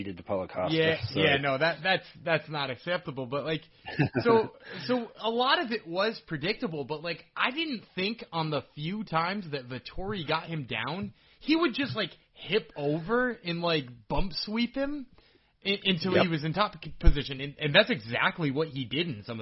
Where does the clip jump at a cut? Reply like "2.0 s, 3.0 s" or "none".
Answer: none